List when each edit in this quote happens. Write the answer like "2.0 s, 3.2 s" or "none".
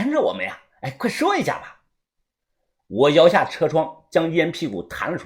none

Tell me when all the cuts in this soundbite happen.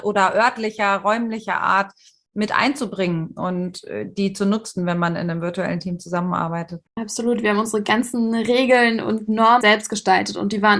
6.9 s, 9.6 s

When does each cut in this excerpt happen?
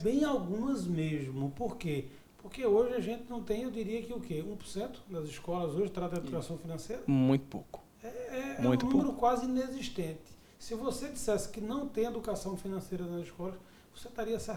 none

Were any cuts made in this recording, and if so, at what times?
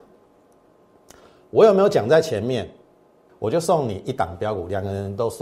3.3 s

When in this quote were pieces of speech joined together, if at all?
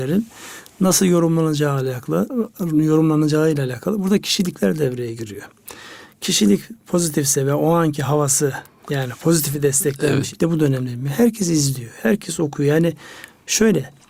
10.3 s

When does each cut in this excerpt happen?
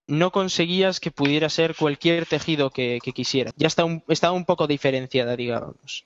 3.5 s

